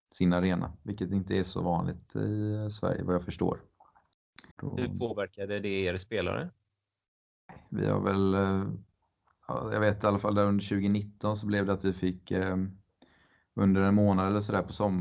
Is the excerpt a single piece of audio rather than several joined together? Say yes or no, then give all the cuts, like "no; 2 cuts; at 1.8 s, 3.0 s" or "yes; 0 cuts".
no; 1 cut; at 4.5 s